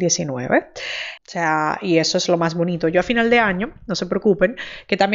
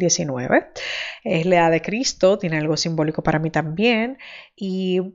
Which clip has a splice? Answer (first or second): first